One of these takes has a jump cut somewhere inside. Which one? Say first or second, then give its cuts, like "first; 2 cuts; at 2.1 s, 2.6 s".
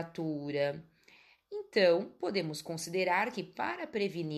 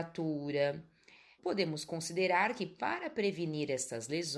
second; 1 cut; at 1.4 s